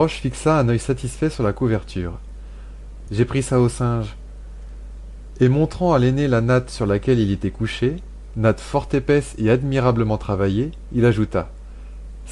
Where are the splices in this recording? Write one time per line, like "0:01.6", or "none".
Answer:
0:03.1